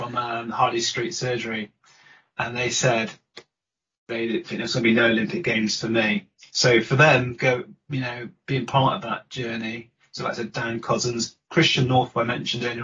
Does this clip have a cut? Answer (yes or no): no